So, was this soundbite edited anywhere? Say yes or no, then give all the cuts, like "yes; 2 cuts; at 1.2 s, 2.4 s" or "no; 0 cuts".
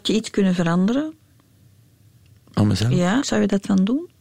yes; 1 cut; at 3.2 s